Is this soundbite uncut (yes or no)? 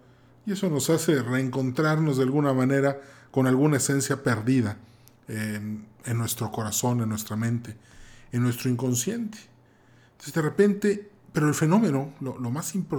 yes